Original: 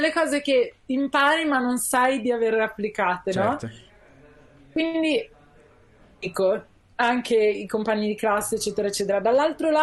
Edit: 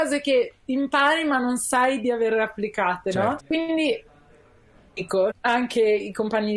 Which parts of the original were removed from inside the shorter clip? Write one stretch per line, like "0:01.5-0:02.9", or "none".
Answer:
0:03.6-0:04.6
0:06.6-0:06.8